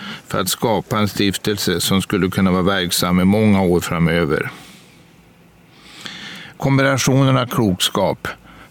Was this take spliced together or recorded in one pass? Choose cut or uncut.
cut